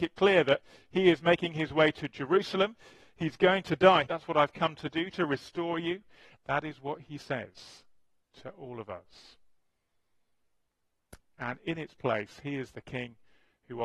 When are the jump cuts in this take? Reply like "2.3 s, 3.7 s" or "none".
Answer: 4.1 s, 6.4 s, 11.2 s